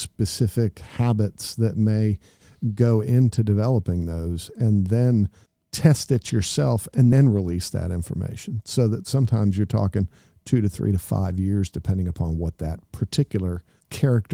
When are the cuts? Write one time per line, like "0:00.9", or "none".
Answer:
none